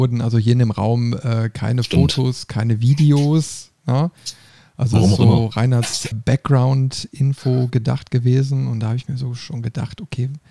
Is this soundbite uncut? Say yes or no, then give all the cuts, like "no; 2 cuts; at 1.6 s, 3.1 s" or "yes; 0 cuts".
no; 1 cut; at 6.1 s